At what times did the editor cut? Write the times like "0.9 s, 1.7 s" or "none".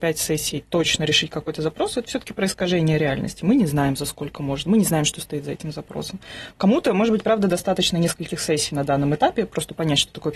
none